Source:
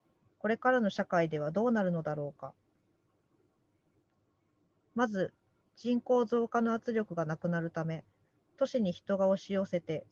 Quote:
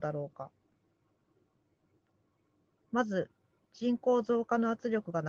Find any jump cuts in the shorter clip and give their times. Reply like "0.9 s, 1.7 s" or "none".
none